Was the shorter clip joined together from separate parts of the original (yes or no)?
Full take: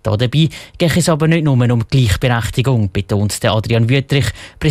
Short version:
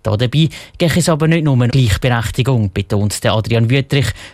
yes